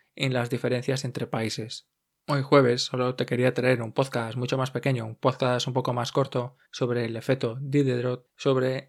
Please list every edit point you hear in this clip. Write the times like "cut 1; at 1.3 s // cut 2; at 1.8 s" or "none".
cut 1; at 2.1 s // cut 2; at 6.6 s

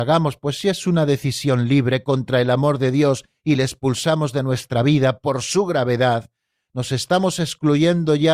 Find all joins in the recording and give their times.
none

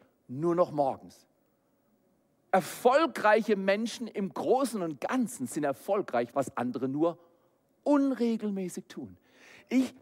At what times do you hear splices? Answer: cut 1; at 2.5 s // cut 2; at 6.3 s

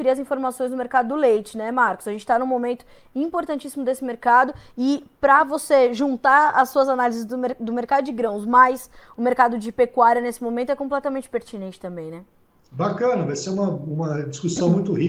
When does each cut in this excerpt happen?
none

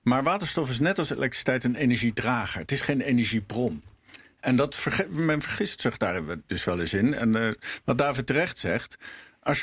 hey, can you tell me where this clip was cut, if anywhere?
none

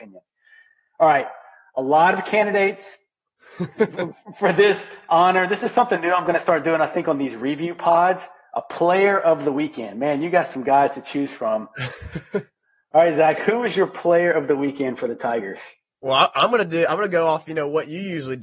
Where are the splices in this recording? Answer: none

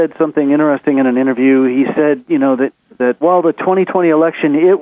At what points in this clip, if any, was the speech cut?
cut 1; at 3.2 s

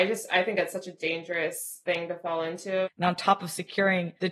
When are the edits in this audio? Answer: cut 1; at 2.8 s

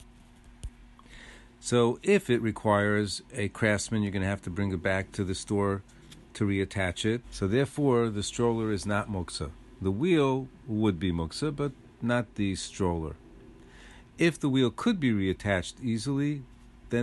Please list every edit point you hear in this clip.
cut 1; at 7.2 s

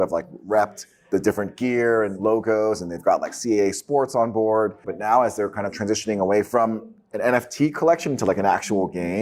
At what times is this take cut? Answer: cut 1; at 4.8 s

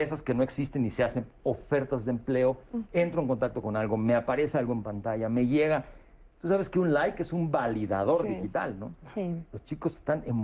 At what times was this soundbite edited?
cut 1; at 2.9 s

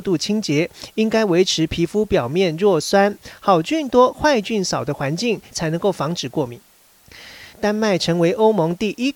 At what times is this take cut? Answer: cut 1; at 5.5 s // cut 2; at 7.5 s

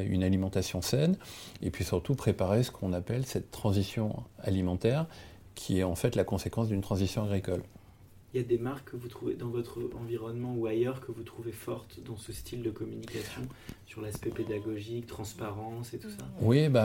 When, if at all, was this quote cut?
none

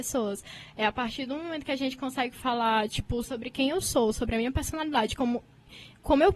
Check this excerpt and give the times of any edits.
cut 1; at 3.2 s

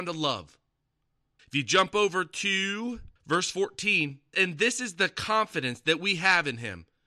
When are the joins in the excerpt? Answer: cut 1; at 1.4 s // cut 2; at 3.2 s // cut 3; at 4.3 s

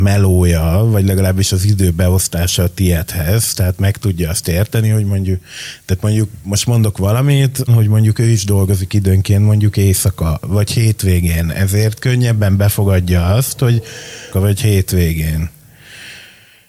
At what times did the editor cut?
cut 1; at 7.7 s // cut 2; at 14.3 s

